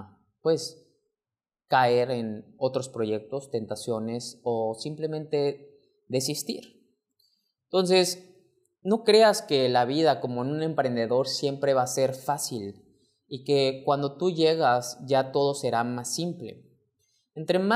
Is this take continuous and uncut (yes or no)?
yes